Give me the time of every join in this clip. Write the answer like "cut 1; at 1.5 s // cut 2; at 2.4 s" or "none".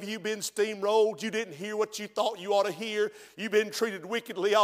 none